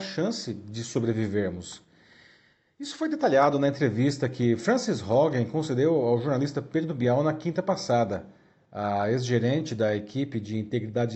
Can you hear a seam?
no; 0 cuts

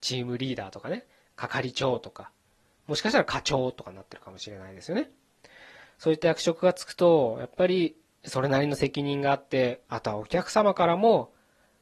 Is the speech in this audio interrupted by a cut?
yes; 1 cut; at 9.9 s

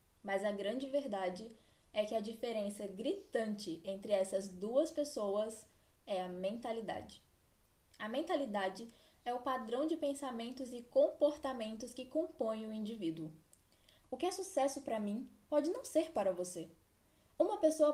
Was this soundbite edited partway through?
yes; 1 cut; at 14.0 s

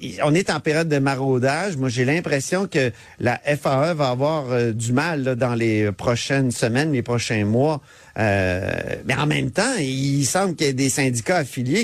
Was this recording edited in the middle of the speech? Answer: no; 0 cuts

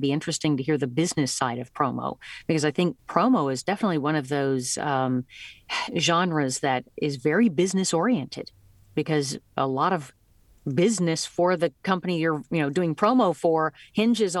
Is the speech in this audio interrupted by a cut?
yes; 1 cut; at 3.0 s

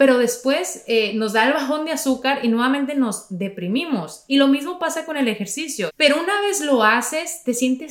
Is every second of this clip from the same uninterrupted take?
no; 1 cut; at 5.9 s

